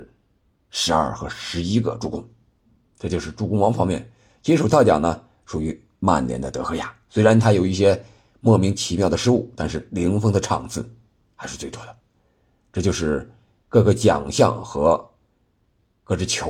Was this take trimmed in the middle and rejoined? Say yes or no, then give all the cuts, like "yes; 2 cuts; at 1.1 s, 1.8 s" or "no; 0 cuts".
no; 0 cuts